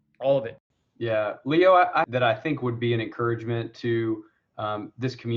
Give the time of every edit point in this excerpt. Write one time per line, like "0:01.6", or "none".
0:02.0

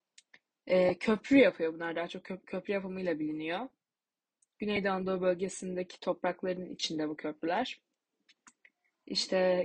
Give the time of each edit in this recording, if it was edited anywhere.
none

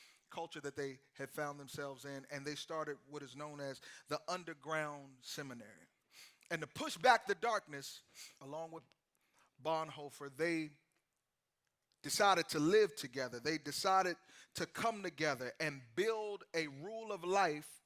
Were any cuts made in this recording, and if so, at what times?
0:08.4

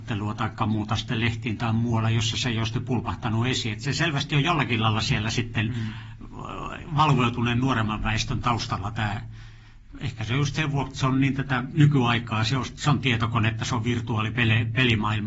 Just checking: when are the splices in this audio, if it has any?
none

